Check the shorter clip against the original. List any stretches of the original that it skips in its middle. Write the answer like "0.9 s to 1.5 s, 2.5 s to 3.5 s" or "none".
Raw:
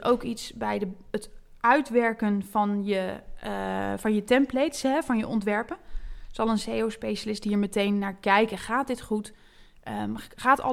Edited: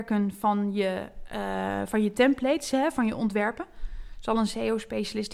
none